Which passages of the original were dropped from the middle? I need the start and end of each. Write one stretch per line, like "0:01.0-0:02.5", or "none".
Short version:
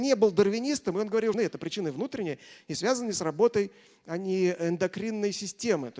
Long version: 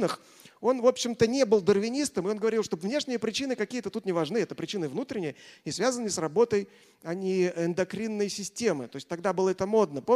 0:02.6-0:04.3